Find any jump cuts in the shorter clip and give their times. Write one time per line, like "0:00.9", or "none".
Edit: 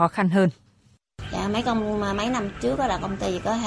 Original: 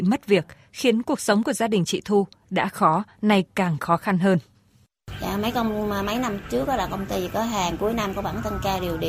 none